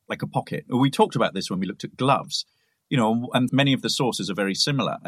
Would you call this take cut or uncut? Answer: cut